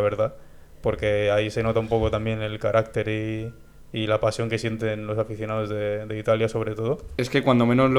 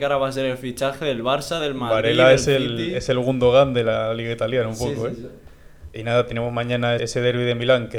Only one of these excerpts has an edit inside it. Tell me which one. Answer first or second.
second